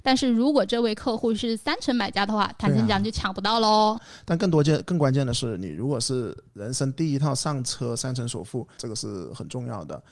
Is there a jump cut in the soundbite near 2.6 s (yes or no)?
no